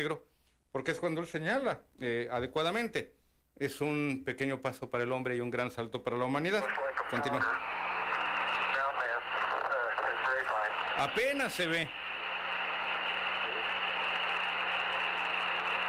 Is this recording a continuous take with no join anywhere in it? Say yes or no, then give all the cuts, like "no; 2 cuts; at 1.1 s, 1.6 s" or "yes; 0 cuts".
yes; 0 cuts